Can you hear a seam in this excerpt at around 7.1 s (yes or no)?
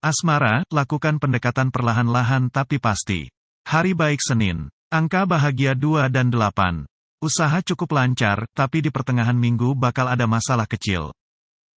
yes